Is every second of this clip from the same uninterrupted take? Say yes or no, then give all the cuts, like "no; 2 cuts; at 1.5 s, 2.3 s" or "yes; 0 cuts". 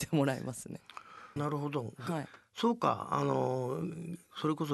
no; 1 cut; at 1.4 s